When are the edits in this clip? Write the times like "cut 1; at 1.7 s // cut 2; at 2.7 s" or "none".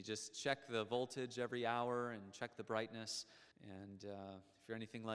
cut 1; at 3.5 s